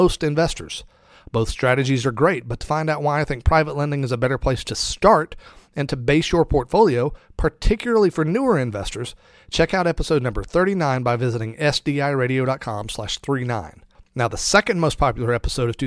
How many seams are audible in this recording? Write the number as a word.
zero